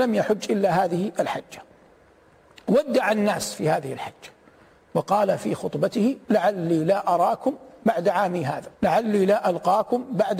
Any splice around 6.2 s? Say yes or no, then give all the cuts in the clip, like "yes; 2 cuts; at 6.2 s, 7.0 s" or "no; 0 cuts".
yes; 2 cuts; at 6.2 s, 8.7 s